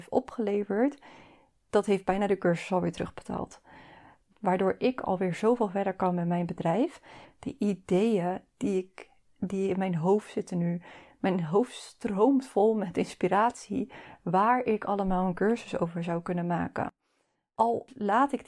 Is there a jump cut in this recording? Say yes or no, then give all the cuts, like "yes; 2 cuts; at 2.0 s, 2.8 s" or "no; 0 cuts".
yes; 2 cuts; at 4.3 s, 7.2 s